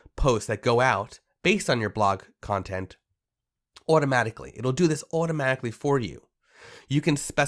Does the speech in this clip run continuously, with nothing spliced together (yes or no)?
yes